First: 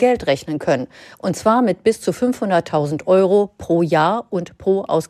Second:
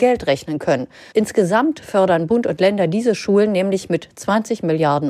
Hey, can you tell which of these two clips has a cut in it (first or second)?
second